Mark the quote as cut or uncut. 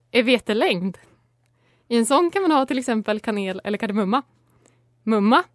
uncut